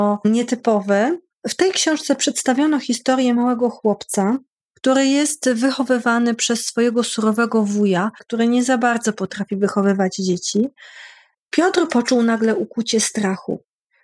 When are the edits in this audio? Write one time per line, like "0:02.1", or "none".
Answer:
0:08.2
0:11.3